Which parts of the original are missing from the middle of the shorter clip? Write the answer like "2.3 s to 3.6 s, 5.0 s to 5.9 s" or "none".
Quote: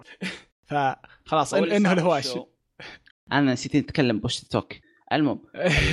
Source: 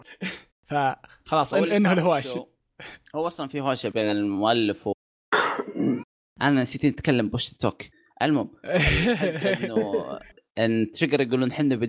3.1 s to 6.2 s